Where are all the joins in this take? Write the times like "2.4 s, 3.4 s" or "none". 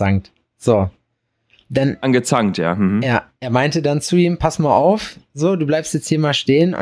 none